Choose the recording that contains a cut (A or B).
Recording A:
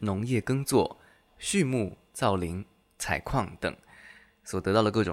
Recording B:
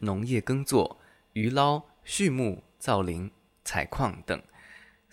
A